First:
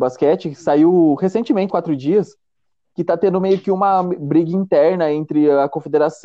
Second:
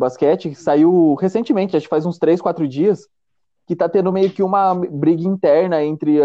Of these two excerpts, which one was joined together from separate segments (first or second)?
first